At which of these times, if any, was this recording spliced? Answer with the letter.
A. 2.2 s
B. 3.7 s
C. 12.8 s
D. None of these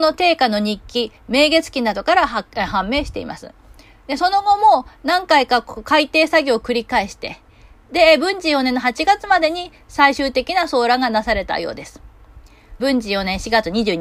C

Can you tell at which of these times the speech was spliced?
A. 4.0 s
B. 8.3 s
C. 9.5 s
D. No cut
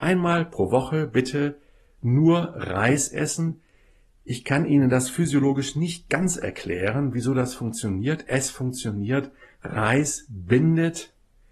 D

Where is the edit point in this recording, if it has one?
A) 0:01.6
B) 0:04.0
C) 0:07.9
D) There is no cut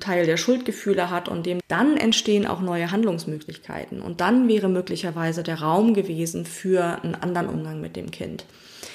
A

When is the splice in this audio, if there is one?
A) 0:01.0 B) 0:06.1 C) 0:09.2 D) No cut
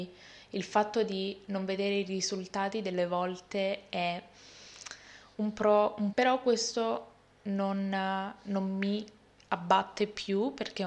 B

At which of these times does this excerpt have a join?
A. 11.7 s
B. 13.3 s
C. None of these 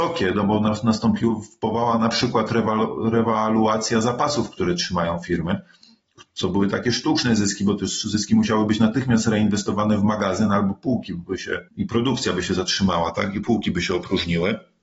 A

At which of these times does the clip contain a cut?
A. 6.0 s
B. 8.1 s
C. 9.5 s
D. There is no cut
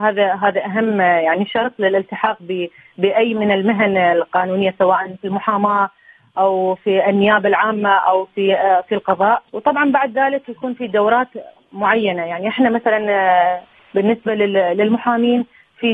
C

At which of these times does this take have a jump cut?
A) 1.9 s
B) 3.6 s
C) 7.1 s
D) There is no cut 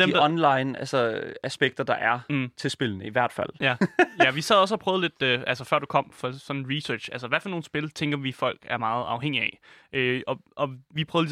B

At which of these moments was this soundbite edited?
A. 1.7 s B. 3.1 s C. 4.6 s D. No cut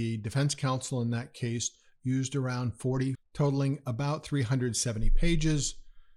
B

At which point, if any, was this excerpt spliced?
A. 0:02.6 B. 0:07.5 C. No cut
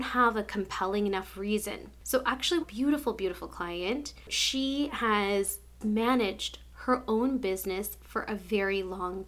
A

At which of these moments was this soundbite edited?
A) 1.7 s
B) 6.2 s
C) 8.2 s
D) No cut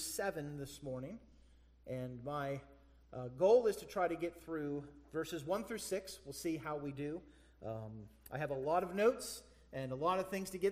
D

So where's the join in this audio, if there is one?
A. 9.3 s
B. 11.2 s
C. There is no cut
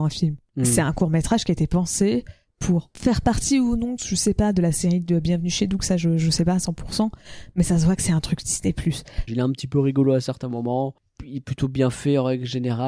A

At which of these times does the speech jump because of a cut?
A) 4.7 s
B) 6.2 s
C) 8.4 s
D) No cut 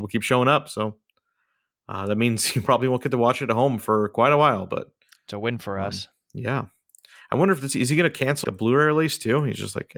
C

